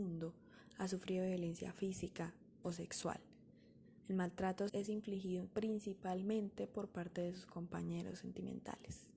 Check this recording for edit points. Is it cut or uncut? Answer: cut